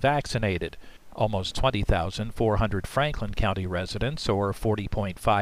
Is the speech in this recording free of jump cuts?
yes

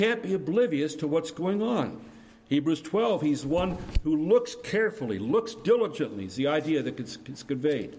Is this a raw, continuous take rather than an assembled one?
yes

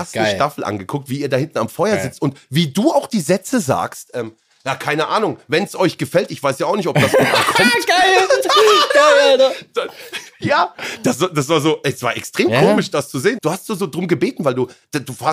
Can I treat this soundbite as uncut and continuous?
no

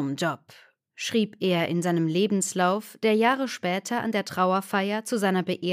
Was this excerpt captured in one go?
yes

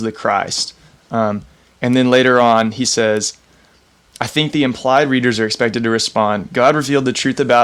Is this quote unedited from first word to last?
yes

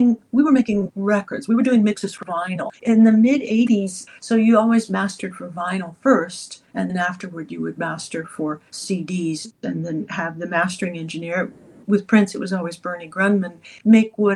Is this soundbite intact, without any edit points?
no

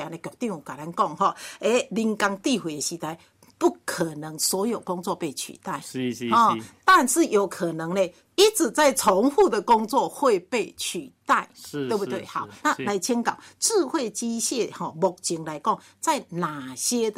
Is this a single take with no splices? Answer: yes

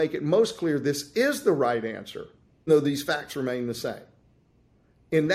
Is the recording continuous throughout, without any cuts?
no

